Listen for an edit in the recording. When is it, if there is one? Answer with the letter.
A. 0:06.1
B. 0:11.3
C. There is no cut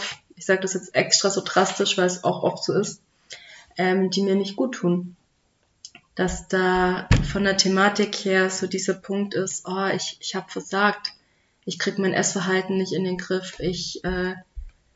A